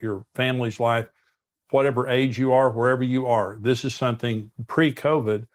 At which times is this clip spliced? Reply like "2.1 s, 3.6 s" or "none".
none